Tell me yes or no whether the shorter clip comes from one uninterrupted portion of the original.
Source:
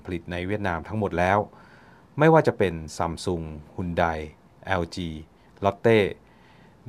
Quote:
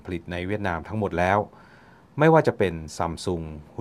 yes